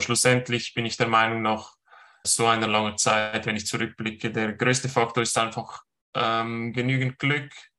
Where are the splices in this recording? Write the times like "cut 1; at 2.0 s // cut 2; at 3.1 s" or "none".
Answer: cut 1; at 2.2 s